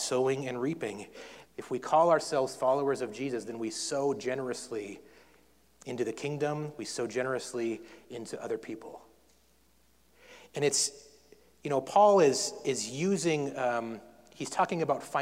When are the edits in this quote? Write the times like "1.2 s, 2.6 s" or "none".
1.4 s